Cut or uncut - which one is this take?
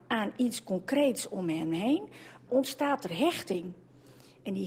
cut